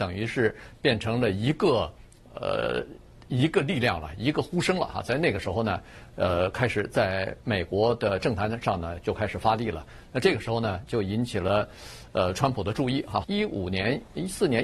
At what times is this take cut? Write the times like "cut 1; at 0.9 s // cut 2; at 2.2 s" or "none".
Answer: cut 1; at 13.2 s